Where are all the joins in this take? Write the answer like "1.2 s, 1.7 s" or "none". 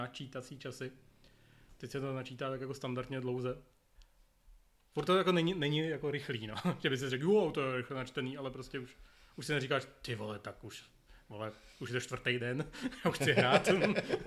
none